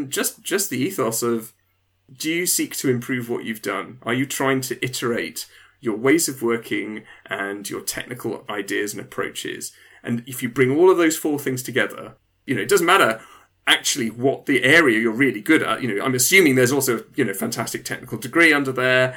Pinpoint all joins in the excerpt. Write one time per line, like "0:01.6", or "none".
none